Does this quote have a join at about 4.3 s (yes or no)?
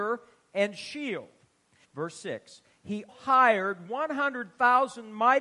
no